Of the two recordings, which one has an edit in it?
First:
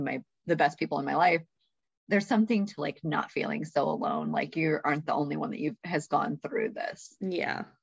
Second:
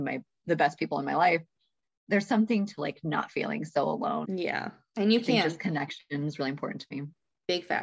second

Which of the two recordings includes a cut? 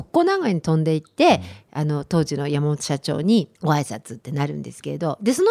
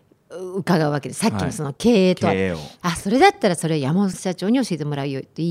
first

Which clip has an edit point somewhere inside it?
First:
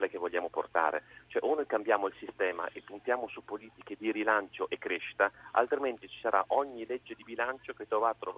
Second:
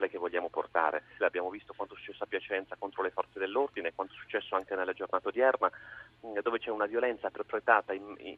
second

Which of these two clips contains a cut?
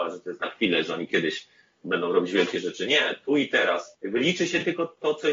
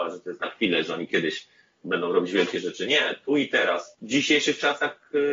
second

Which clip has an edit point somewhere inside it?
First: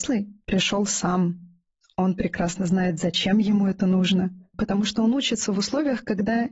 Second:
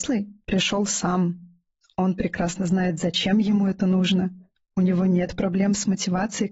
first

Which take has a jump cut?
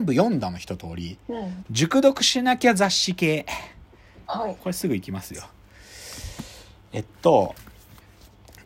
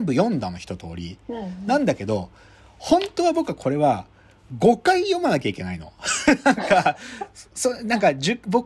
first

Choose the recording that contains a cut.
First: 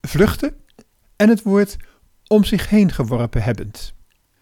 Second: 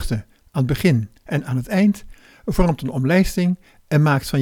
first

